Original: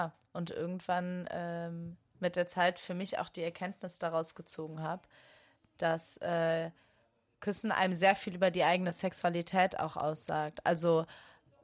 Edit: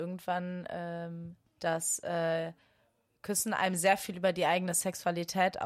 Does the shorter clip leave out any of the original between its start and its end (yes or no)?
yes